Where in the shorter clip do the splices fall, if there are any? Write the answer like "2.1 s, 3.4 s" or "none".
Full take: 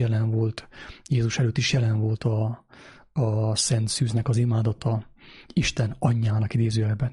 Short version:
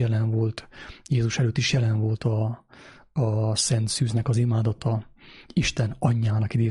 none